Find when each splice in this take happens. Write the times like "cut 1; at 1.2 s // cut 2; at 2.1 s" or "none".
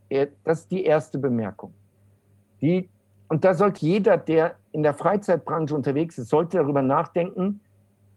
cut 1; at 3.8 s